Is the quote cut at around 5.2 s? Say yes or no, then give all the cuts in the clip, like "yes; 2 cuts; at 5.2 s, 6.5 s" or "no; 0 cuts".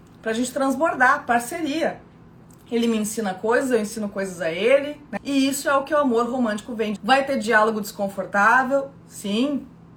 yes; 2 cuts; at 5.2 s, 7.0 s